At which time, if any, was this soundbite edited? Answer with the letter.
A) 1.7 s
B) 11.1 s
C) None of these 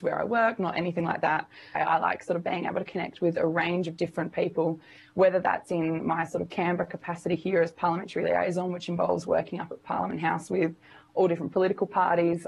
A